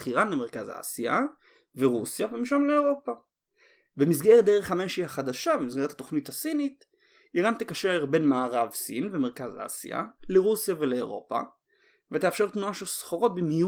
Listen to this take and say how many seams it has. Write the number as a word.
zero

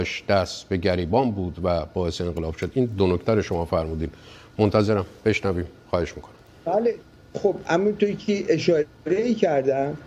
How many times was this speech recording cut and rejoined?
zero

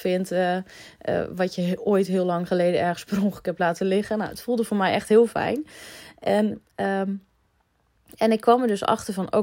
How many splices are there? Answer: zero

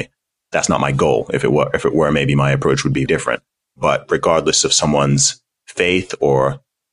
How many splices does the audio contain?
one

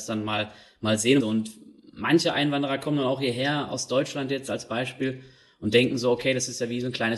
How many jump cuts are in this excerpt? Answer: one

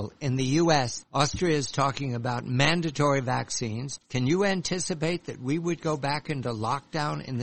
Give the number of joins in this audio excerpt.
two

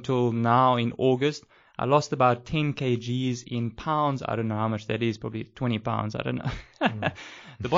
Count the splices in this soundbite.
zero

